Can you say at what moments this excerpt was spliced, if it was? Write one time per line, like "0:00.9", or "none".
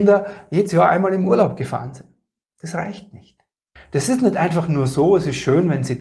0:03.8